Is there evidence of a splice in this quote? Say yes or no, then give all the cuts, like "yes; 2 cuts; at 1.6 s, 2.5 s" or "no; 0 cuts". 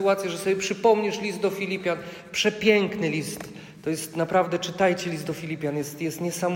no; 0 cuts